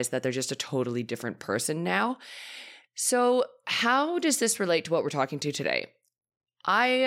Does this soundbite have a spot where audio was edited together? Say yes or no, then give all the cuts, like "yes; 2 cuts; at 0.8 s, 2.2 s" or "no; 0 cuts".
yes; 1 cut; at 2.9 s